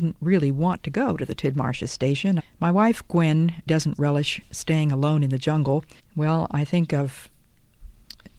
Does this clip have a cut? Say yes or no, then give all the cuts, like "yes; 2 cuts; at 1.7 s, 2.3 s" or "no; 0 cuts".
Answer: yes; 3 cuts; at 2.4 s, 3.7 s, 6.0 s